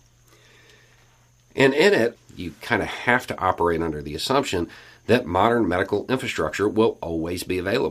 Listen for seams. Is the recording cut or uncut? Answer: cut